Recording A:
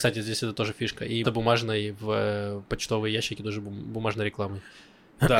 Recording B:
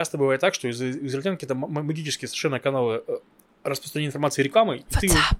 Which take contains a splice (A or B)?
A